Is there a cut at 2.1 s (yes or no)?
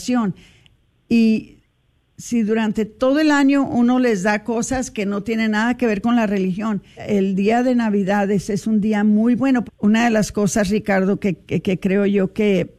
no